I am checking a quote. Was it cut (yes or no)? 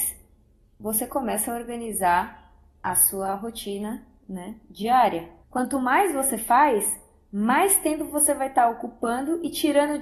yes